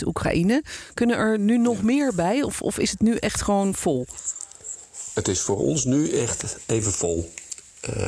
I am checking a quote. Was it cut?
no; 0 cuts

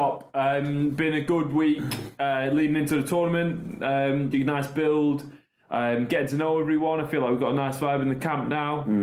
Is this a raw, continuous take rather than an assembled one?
no; 1 cut; at 4.3 s

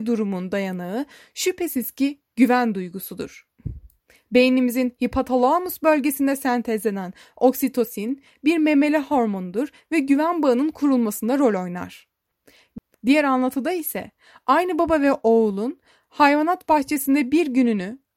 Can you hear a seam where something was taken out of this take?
yes; 1 cut; at 12.9 s

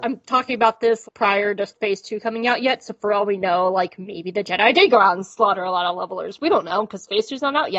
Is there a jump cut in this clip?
yes; 1 cut; at 1.0 s

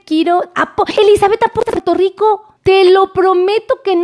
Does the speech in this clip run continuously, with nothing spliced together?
no; 1 cut; at 2.6 s

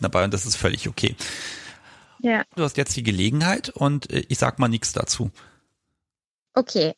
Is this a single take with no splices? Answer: no; 1 cut; at 2.6 s

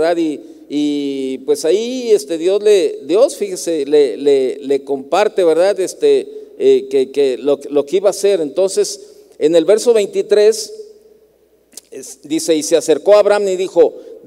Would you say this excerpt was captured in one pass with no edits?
yes; 0 cuts

